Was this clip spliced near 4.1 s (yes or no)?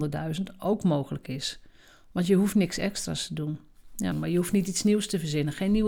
yes